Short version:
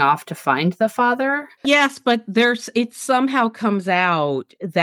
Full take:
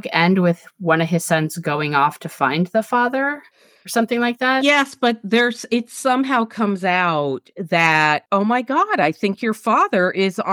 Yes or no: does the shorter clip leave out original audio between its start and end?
yes